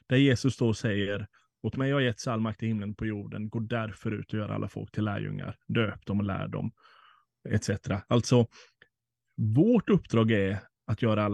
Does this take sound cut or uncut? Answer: uncut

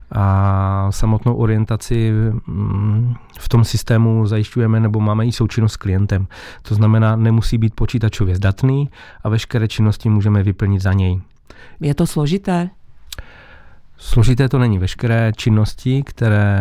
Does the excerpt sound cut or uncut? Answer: cut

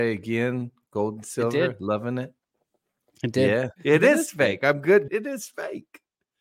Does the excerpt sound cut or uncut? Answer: cut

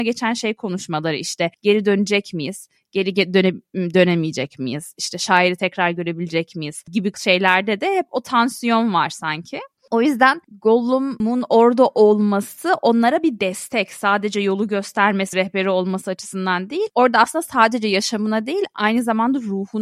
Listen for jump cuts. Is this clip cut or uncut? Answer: cut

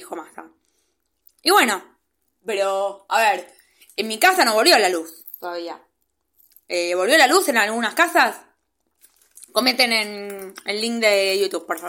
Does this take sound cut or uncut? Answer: uncut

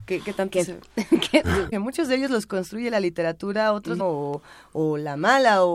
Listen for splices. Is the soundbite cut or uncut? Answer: cut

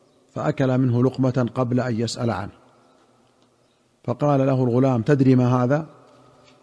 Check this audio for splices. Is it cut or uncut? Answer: uncut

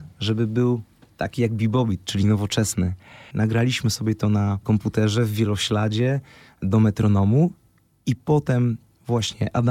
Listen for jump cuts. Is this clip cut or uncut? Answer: cut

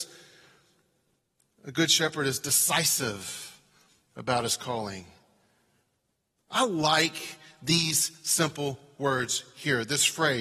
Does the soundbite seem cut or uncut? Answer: uncut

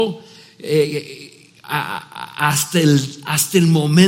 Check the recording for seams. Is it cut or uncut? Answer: uncut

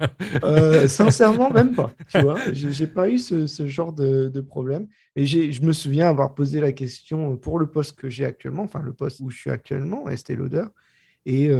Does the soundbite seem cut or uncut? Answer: cut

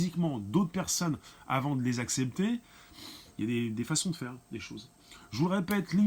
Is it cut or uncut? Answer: uncut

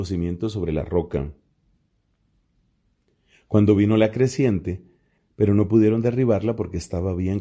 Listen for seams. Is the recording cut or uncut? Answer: cut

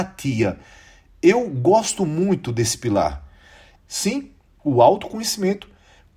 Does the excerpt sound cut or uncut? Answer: cut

